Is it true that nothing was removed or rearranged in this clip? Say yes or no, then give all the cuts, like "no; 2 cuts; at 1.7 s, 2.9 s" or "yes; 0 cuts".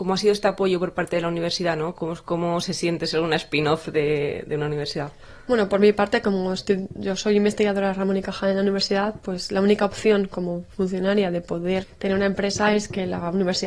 no; 1 cut; at 11.8 s